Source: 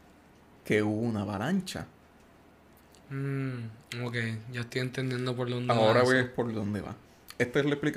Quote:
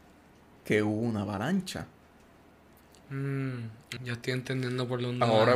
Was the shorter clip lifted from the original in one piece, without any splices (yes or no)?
no